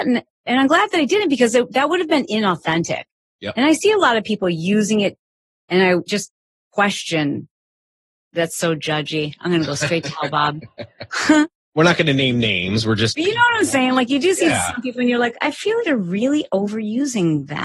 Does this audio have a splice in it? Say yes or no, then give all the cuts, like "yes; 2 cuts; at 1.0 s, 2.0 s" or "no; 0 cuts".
yes; 1 cut; at 15.8 s